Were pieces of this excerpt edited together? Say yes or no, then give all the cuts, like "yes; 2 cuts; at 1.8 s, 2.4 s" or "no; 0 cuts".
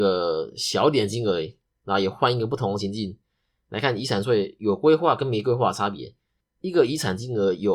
no; 0 cuts